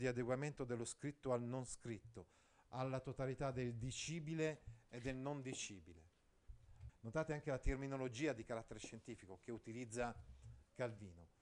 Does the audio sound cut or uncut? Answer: cut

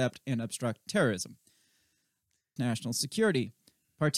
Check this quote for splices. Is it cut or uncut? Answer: cut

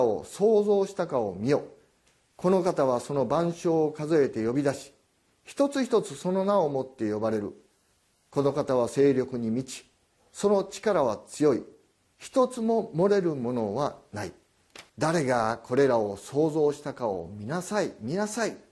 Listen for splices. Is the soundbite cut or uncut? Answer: cut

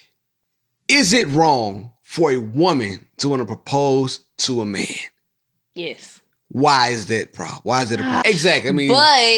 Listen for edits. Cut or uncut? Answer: cut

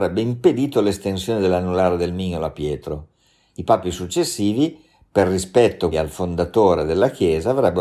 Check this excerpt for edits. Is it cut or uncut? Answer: cut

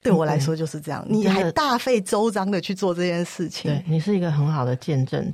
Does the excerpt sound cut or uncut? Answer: uncut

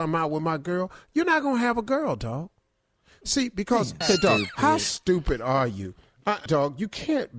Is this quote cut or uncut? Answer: cut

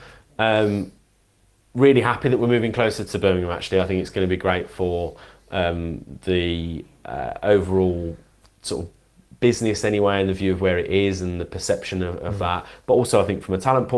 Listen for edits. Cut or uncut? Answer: uncut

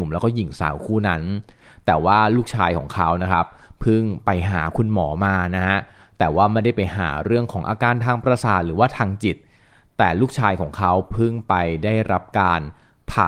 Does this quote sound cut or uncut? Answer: uncut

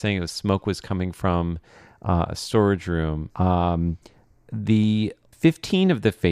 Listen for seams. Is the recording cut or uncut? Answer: cut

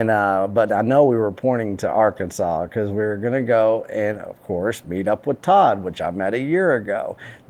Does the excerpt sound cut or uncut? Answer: uncut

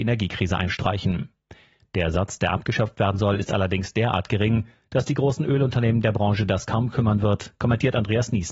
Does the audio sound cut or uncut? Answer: uncut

